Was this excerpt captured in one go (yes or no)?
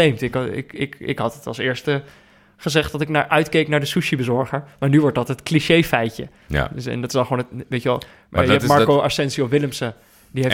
yes